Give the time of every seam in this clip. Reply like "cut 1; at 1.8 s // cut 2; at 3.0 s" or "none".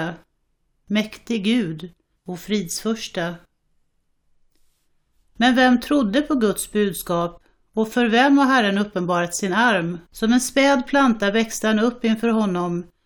cut 1; at 2.2 s // cut 2; at 5.2 s // cut 3; at 10.1 s